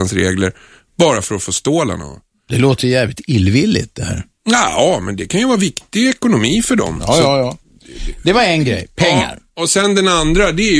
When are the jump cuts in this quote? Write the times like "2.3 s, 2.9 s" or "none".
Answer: none